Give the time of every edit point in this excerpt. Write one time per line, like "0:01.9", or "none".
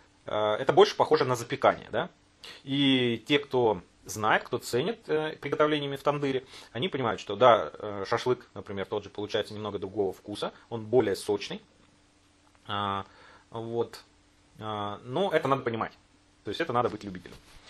none